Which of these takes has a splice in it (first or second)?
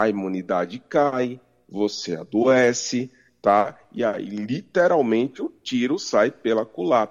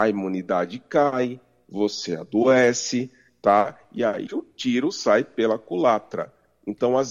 second